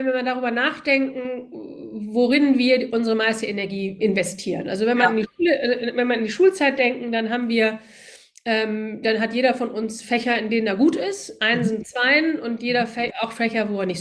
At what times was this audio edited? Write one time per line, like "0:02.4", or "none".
0:04.0